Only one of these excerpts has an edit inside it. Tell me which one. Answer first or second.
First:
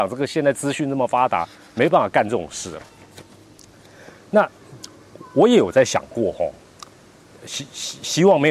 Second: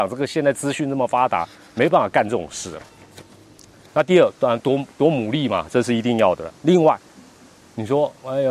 second